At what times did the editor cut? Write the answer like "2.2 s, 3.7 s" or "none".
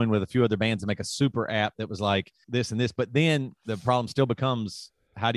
2.4 s